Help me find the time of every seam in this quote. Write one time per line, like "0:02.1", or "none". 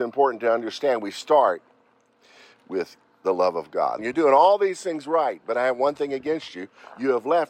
0:04.0